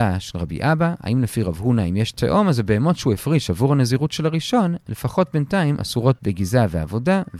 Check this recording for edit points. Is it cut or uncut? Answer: uncut